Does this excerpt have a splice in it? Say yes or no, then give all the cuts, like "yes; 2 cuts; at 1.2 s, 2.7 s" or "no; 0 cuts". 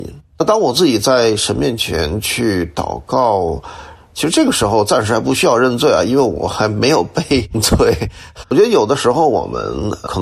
yes; 2 cuts; at 4.0 s, 8.4 s